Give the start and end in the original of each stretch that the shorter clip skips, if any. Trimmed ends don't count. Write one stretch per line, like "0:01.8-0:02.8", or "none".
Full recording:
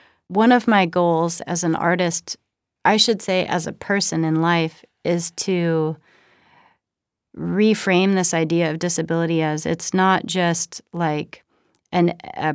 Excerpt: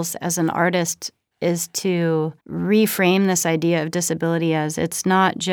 0:02.6-0:04.9
0:06.0-0:07.3